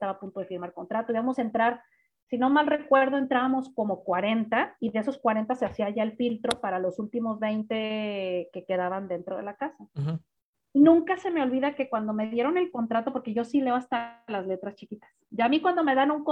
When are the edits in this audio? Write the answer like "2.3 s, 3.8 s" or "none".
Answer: 9.9 s

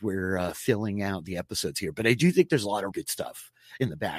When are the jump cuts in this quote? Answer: 2.9 s

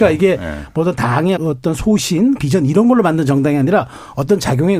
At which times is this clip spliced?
1.4 s, 2.4 s

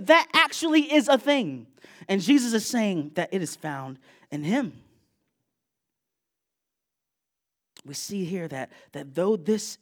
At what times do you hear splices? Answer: none

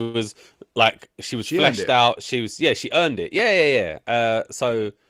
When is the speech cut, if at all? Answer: none

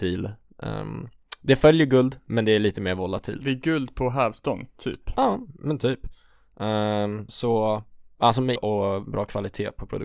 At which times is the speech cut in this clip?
7.3 s, 8.6 s

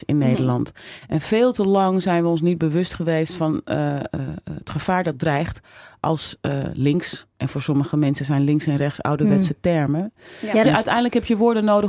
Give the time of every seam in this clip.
7.3 s, 10.6 s

